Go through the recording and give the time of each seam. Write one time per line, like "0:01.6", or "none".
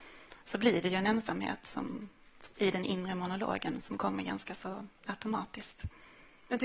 none